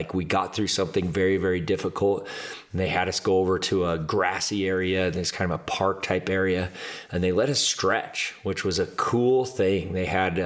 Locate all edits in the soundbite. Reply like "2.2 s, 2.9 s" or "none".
none